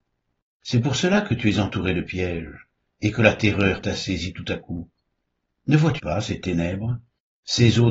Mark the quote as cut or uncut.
cut